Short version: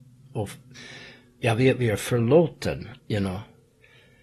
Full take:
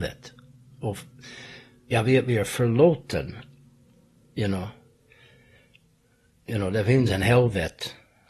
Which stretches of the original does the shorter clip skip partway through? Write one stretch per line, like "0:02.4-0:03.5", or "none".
0:03.5-0:04.3